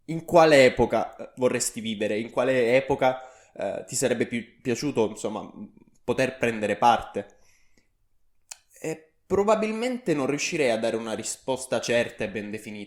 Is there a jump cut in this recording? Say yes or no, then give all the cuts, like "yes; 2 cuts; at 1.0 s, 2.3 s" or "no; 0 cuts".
no; 0 cuts